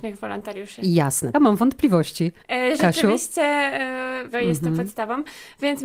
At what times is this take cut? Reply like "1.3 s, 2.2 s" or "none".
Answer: 1.3 s, 4.3 s